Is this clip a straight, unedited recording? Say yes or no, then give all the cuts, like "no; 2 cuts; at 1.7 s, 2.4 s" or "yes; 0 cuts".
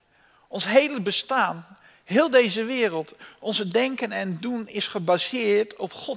yes; 0 cuts